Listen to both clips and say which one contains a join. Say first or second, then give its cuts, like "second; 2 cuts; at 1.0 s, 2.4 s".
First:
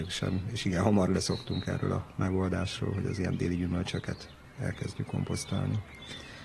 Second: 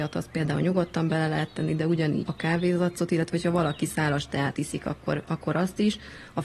second; 1 cut; at 2.3 s